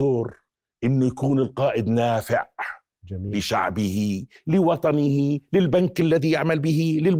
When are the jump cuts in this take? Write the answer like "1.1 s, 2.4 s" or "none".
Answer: none